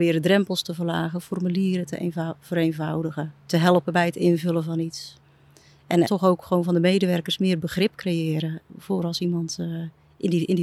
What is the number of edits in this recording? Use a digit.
2